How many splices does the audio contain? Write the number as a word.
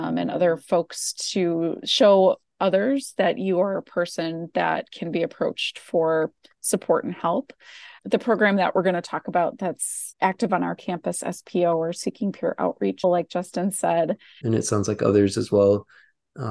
two